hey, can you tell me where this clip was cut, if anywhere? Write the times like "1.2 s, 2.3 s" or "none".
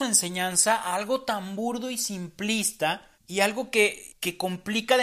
3.1 s